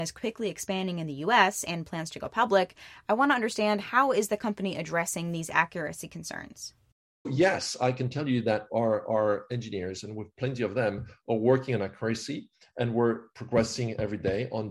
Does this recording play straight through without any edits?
yes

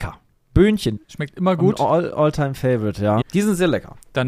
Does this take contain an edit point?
yes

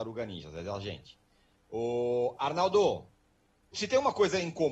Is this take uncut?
no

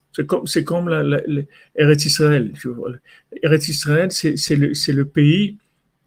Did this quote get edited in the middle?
no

